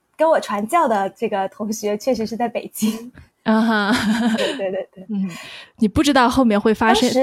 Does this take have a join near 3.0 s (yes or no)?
no